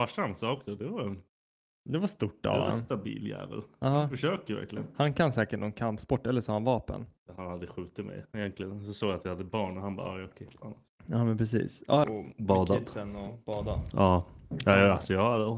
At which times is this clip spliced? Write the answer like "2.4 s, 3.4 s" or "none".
12.0 s

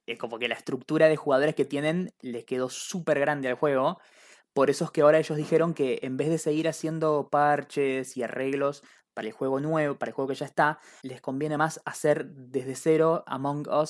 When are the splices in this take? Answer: 11.0 s

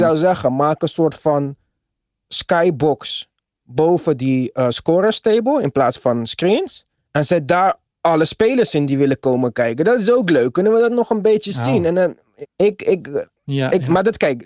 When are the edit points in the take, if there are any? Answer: 12.4 s

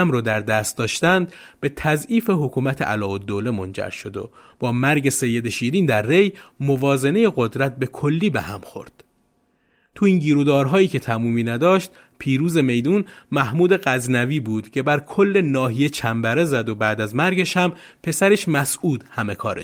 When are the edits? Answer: none

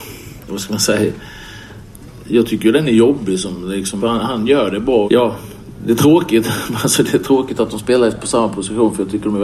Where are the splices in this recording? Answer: 4.0 s, 5.0 s

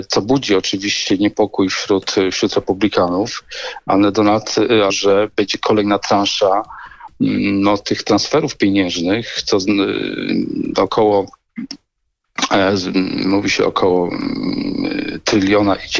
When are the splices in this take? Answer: 4.9 s

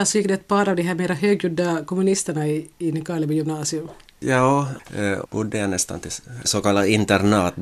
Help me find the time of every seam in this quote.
5.2 s, 6.4 s

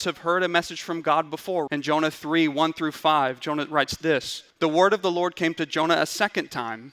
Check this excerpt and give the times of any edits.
1.7 s, 4.5 s

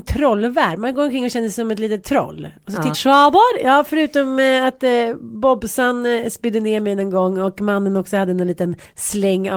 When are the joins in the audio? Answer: 2.9 s

